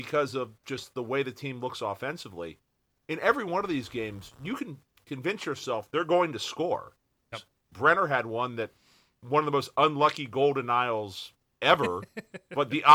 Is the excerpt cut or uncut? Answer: cut